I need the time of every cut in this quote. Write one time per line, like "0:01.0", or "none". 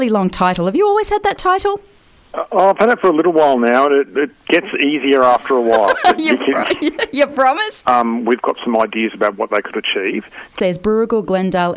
0:07.8
0:10.6